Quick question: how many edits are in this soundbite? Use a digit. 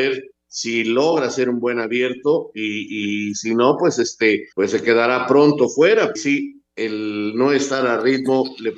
2